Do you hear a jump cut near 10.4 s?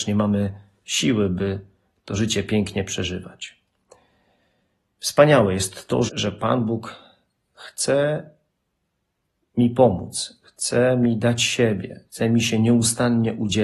no; 2 cuts; at 6.1 s, 12.1 s

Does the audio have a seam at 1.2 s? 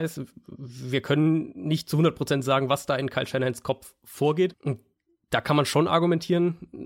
no; 1 cut; at 4.5 s

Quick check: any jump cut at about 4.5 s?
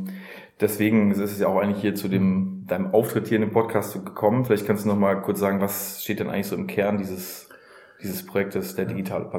no; 0 cuts

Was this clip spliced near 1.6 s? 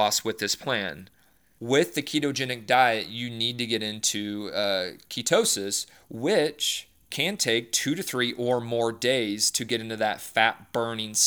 yes; 1 cut; at 1.6 s

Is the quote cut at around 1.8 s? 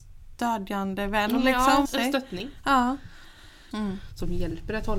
yes; 2 cuts; at 1.8 s, 3.7 s

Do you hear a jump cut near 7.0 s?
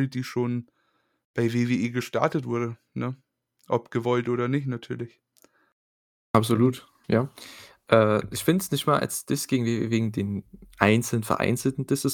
yes; 1 cut; at 7.0 s

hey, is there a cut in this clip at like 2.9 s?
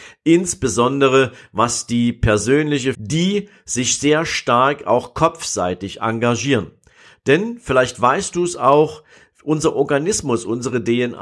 yes; 1 cut; at 2.9 s

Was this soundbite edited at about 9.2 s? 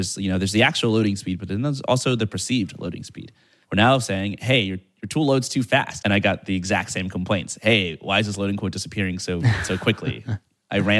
no; 2 cuts; at 3.6 s, 6.0 s

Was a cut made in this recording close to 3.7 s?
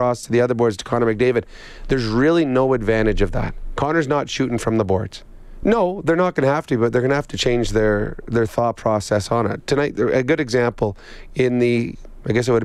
no; 1 cut; at 5.6 s

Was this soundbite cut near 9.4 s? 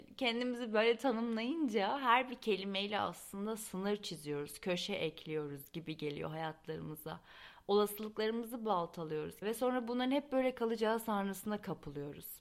yes; 1 cut; at 9.4 s

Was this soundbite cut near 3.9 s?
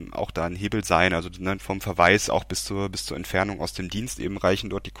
no; 1 cut; at 1.6 s

